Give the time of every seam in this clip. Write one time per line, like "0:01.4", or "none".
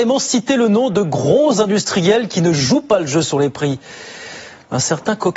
none